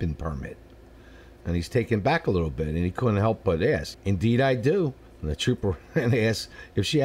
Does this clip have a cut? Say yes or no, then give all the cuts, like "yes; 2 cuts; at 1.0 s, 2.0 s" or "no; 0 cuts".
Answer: yes; 2 cuts; at 3.9 s, 5.1 s